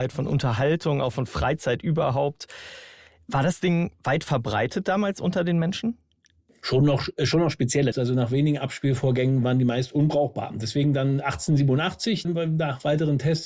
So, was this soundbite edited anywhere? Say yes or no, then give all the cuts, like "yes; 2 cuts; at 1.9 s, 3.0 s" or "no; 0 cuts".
yes; 3 cuts; at 7.9 s, 9.4 s, 12.2 s